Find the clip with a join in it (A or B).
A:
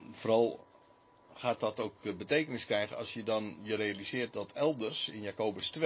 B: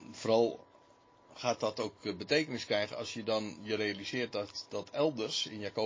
A